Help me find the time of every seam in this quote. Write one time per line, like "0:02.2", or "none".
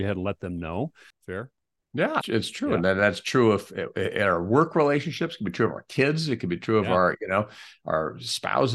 0:02.2

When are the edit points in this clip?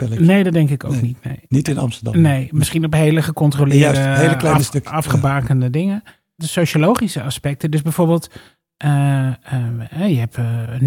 0:06.4

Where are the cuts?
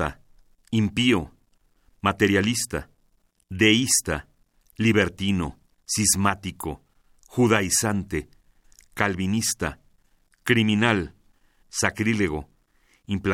0:05.7
0:08.8
0:11.6

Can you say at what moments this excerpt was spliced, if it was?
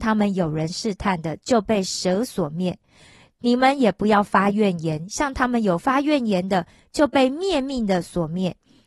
none

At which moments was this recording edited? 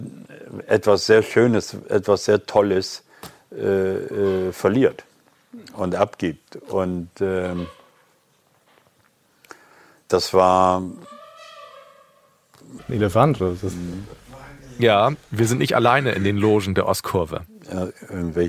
0:12.8

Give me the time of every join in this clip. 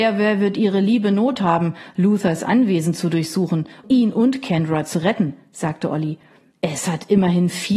0:03.8

